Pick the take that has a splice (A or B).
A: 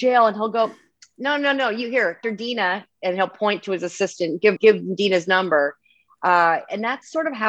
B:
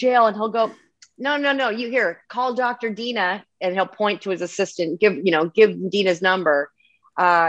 A